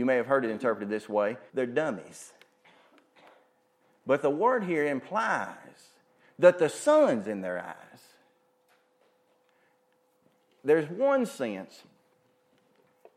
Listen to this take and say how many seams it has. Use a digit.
2